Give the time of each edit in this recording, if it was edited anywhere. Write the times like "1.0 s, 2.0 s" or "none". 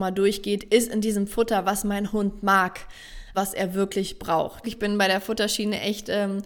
3.3 s, 4.6 s

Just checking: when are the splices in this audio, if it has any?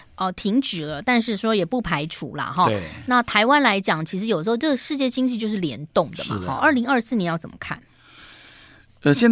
none

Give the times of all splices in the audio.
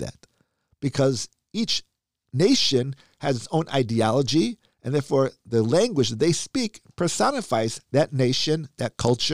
none

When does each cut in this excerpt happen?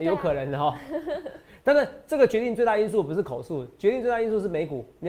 none

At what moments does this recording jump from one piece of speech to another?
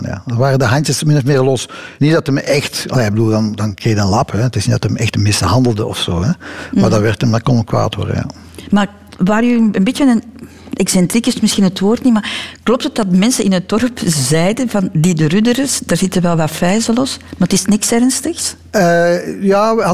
none

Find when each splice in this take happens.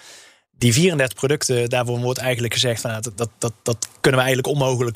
none

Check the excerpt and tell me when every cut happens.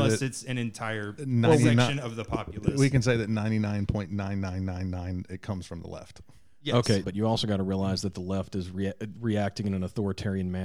5.3 s, 7.0 s

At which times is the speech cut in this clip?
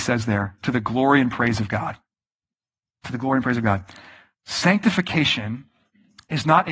none

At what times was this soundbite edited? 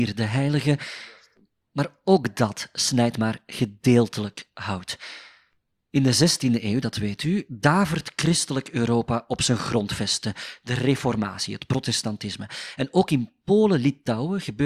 none

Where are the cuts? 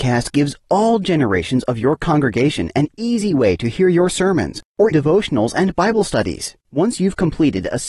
4.9 s

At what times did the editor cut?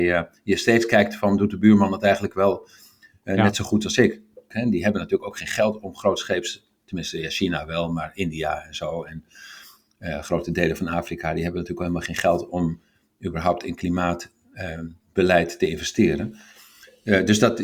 4.5 s

